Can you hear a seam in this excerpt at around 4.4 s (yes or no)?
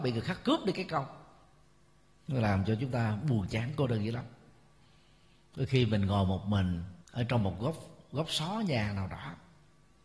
no